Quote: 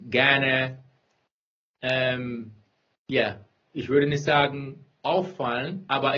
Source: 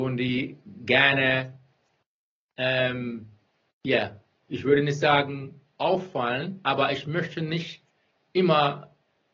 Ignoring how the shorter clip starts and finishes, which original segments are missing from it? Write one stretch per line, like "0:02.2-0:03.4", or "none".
none

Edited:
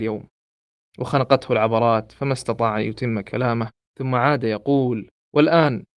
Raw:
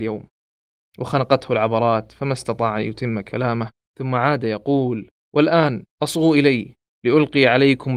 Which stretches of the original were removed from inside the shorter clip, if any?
none

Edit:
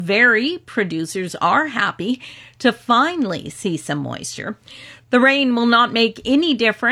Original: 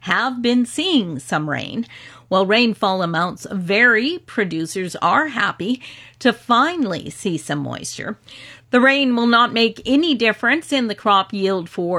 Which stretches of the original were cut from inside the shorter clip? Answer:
none

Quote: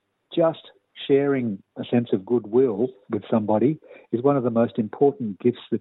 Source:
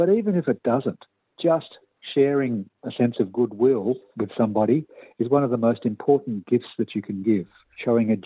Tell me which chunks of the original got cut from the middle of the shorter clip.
none

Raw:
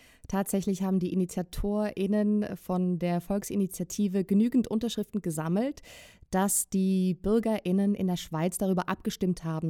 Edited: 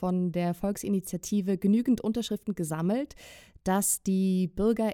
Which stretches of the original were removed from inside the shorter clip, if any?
none

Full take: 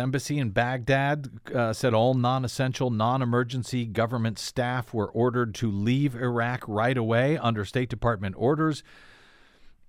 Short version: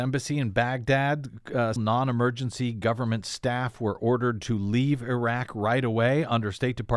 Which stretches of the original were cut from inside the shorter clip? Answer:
0:01.8-0:02.9

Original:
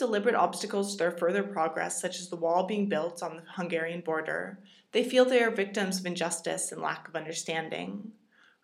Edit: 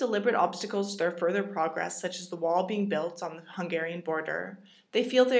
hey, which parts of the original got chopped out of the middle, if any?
none

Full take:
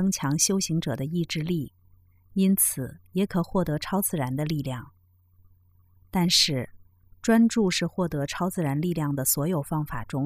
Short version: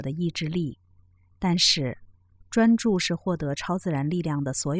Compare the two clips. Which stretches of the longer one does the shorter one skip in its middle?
0:02.3-0:06.1

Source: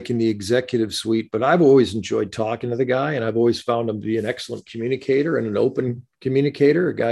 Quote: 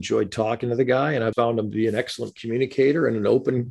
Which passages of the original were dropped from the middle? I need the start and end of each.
0:03.3-0:03.6

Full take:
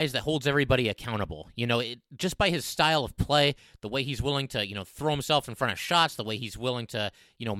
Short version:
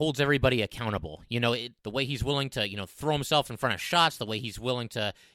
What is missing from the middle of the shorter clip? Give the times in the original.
0:02.1-0:03.8

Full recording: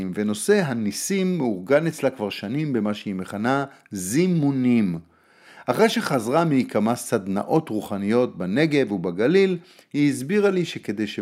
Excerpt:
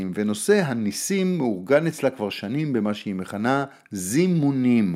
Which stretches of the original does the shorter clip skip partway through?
none

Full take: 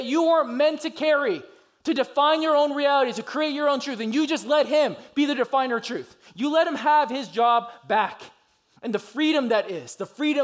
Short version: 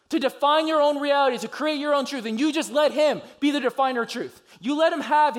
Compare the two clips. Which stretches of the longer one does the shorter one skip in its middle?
none

